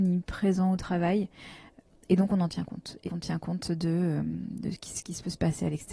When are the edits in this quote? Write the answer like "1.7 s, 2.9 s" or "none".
3.1 s